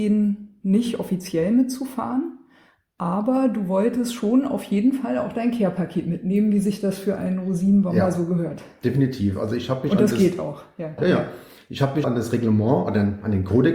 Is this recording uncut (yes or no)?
no